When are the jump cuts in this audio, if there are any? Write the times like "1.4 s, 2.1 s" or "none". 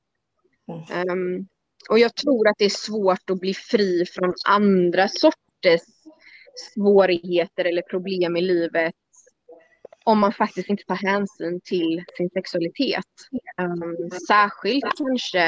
none